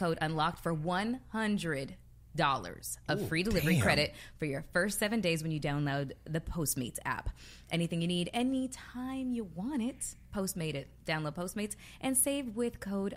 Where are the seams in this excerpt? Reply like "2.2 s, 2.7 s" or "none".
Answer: none